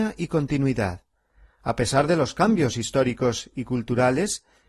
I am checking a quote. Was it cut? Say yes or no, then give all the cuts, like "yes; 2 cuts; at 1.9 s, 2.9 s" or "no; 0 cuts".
no; 0 cuts